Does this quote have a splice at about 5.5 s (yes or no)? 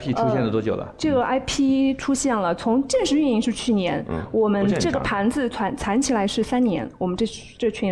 no